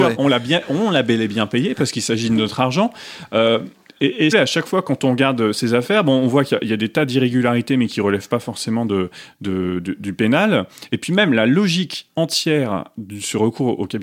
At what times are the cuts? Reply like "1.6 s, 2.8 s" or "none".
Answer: 4.3 s